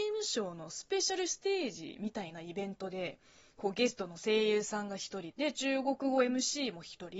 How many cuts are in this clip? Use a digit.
1